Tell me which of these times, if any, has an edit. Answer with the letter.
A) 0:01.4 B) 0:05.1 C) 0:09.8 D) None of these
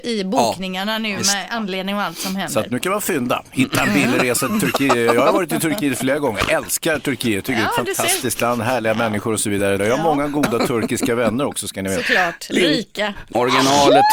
C